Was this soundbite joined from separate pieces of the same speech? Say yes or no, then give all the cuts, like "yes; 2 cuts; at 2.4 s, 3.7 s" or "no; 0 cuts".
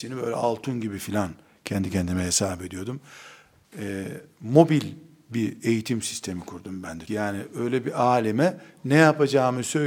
yes; 2 cuts; at 3.6 s, 7.1 s